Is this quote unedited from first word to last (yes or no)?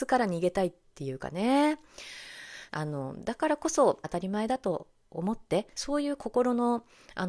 no